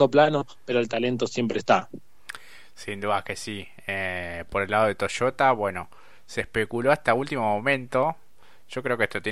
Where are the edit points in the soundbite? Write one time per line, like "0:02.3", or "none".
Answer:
none